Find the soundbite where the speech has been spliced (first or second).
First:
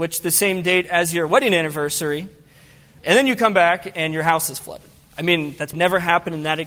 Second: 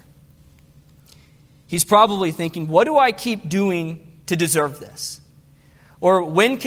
first